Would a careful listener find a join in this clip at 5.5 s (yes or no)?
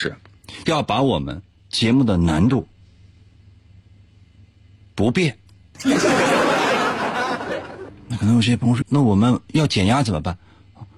no